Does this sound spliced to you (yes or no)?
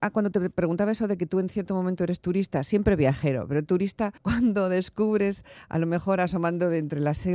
yes